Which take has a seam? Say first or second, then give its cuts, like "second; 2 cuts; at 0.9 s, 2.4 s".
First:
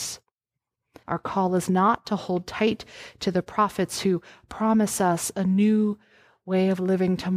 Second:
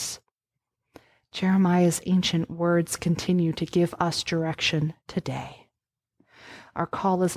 first; 1 cut; at 1.0 s